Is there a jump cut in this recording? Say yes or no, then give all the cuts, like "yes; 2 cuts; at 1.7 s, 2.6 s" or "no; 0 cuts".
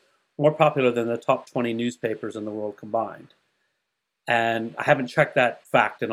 no; 0 cuts